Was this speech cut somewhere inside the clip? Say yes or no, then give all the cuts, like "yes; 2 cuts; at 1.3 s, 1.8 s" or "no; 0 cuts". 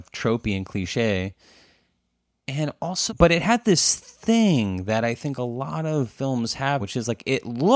yes; 2 cuts; at 3.1 s, 6.8 s